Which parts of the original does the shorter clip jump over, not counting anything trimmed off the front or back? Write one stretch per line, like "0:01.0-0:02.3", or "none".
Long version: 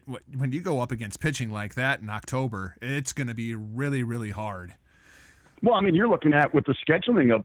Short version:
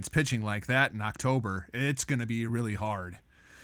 0:03.6-0:04.0